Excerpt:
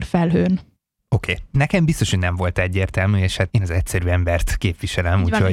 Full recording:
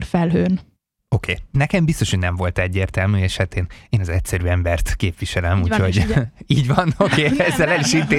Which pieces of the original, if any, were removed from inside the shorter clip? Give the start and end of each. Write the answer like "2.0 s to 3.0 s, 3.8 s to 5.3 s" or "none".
3.5 s to 3.9 s